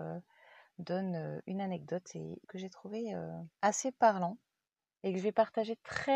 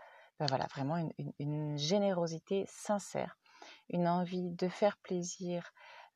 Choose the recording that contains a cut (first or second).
first